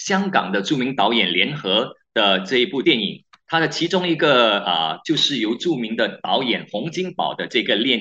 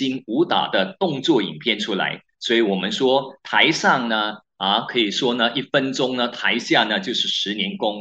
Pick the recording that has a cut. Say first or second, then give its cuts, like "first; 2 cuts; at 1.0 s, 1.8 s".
first; 2 cuts; at 2.8 s, 5.0 s